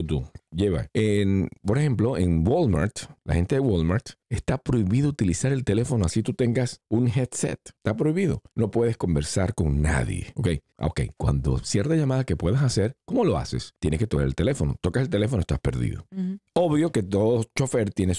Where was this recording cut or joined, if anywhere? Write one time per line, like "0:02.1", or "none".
0:10.7